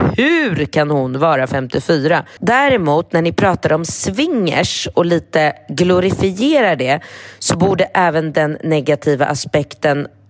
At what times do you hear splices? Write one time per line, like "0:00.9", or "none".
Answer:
0:02.4